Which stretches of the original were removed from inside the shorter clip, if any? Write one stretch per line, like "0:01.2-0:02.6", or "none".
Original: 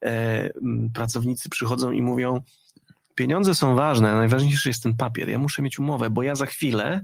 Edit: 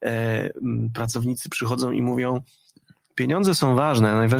none